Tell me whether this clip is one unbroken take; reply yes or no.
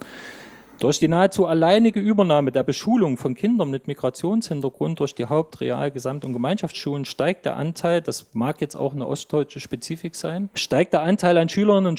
no